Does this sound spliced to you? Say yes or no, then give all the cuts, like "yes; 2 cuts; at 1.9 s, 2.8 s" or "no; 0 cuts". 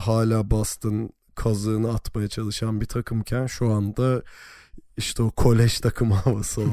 no; 0 cuts